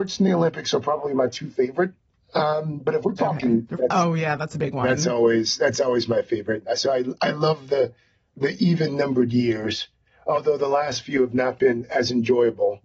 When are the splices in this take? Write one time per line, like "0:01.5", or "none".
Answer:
0:03.7